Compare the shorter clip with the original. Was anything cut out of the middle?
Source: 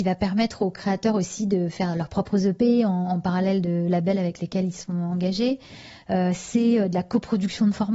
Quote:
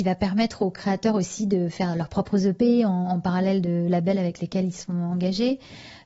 no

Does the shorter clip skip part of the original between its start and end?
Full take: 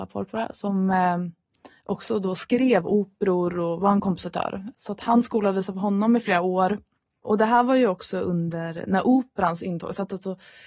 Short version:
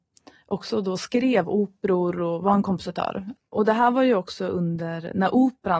yes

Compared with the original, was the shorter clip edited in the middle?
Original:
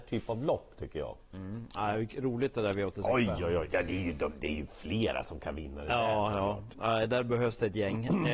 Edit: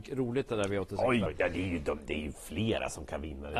yes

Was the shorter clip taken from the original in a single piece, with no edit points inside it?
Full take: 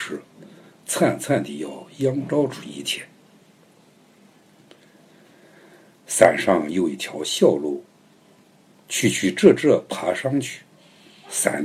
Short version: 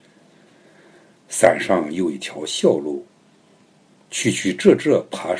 yes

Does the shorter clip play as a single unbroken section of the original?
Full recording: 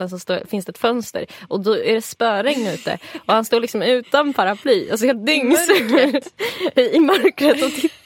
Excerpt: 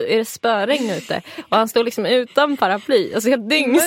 yes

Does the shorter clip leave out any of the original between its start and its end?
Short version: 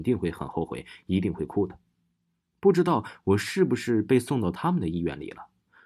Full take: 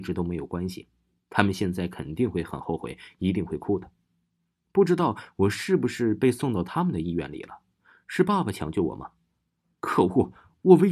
no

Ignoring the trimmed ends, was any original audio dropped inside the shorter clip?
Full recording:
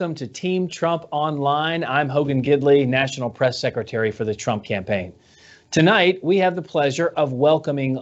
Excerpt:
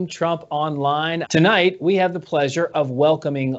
yes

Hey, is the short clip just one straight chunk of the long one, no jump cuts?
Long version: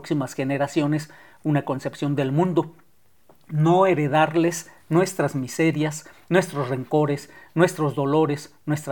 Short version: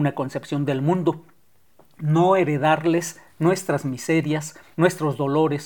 no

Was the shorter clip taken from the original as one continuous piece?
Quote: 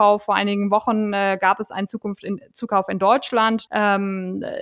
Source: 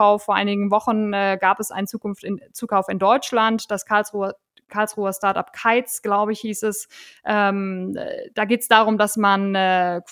no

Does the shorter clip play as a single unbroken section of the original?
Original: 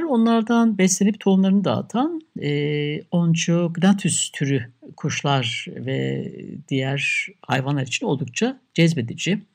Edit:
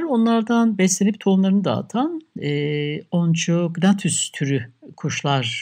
yes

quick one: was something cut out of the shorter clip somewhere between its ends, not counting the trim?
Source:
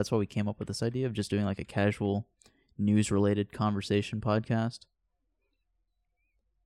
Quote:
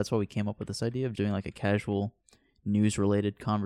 yes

